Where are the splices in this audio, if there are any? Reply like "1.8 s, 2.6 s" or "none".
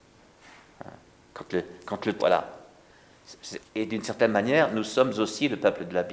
2.2 s, 3.6 s